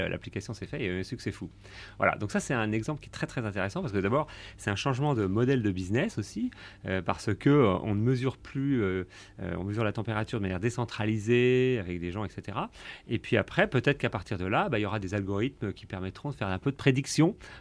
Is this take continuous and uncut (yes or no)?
yes